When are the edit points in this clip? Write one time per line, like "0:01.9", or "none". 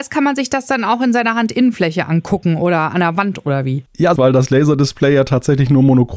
0:04.2